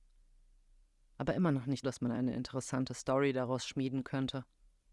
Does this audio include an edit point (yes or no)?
yes